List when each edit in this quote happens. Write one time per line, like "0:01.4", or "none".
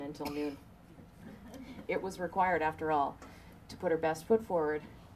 none